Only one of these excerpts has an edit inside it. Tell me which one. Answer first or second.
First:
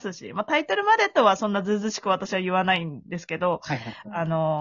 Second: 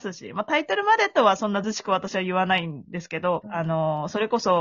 second